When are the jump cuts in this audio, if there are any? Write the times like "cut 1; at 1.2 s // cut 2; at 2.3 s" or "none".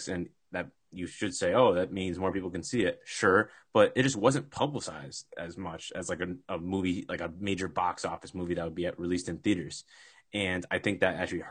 none